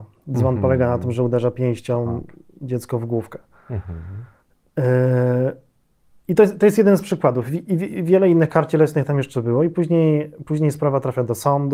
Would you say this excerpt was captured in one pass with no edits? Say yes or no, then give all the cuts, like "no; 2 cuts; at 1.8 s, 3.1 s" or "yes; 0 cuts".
yes; 0 cuts